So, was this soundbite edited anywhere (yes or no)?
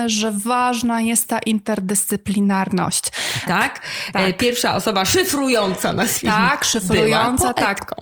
yes